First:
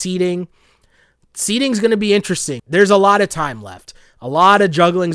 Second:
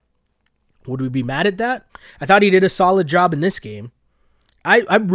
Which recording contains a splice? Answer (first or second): first